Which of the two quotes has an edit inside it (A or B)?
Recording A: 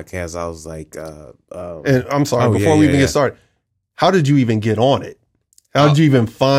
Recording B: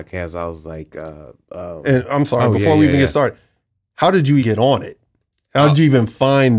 B